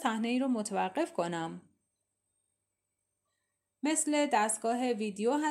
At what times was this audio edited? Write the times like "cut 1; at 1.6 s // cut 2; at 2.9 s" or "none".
none